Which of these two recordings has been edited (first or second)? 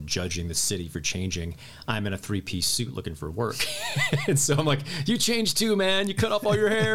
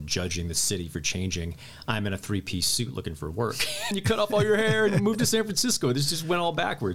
second